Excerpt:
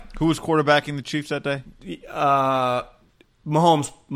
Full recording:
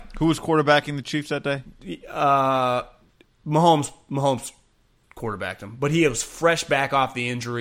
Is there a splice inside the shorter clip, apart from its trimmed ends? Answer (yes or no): no